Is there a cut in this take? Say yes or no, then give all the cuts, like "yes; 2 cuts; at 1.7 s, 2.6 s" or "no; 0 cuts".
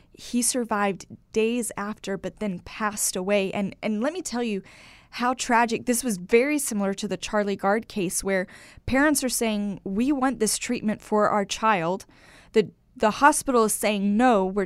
no; 0 cuts